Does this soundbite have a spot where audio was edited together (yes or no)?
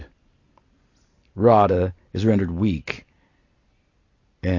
no